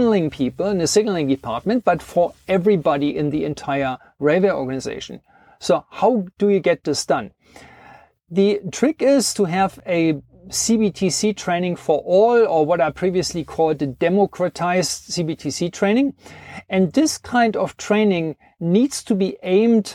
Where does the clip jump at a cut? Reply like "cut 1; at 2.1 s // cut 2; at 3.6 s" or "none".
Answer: none